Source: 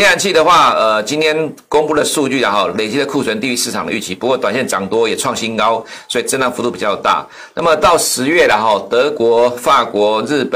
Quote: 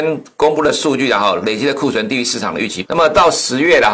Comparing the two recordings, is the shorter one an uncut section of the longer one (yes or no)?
no